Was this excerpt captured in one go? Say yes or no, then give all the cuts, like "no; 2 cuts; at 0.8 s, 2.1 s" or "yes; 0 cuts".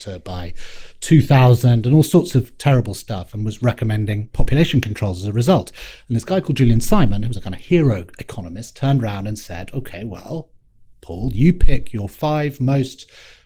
yes; 0 cuts